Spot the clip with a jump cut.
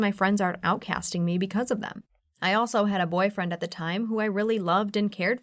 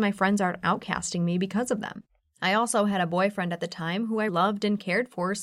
second; 1 cut; at 4.3 s

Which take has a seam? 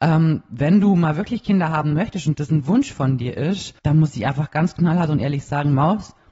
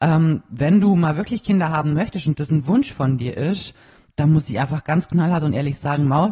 first; 1 cut; at 3.8 s

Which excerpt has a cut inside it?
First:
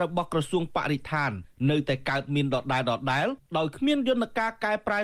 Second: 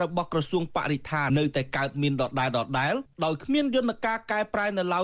second; 1 cut; at 1.3 s

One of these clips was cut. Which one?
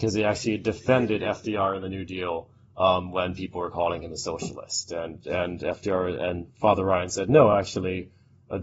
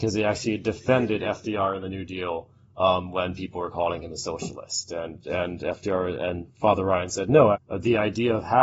second; 1 cut; at 7.5 s

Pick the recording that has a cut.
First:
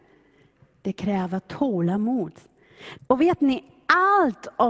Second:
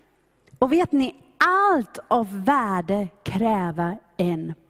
first; 1 cut; at 3.0 s

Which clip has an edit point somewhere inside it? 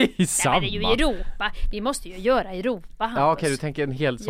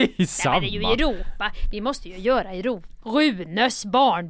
second; 1 cut; at 3.0 s

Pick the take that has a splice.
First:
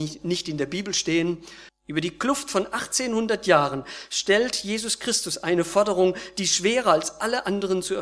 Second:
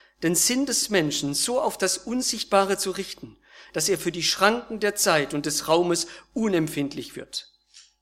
first; 1 cut; at 1.7 s

